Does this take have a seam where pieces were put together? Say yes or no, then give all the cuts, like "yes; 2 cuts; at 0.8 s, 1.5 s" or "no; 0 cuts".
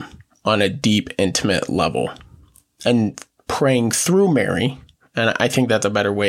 no; 0 cuts